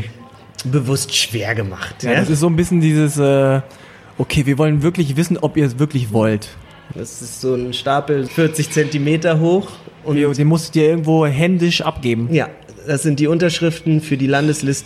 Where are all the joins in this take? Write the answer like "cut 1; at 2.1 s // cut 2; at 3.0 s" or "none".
cut 1; at 6.9 s // cut 2; at 8.3 s